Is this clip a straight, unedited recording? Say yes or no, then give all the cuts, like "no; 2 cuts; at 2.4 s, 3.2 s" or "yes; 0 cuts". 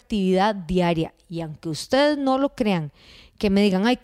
yes; 0 cuts